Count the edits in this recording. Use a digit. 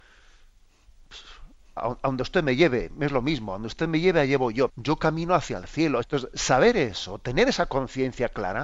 3